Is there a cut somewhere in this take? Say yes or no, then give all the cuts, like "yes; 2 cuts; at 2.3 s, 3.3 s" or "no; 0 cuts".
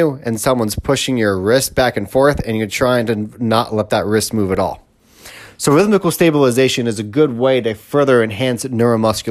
no; 0 cuts